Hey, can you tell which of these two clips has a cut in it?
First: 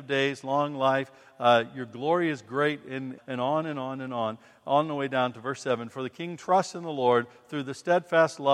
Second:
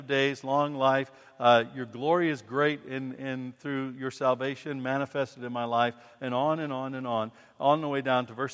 first; 1 cut; at 3.2 s

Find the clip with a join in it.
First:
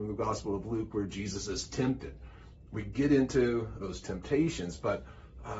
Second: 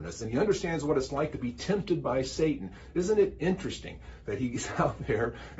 first; 1 cut; at 3.8 s

